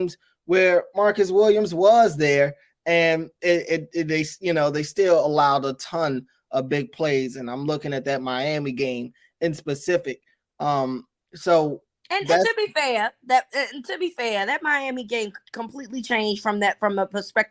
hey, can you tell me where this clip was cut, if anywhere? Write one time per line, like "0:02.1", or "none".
none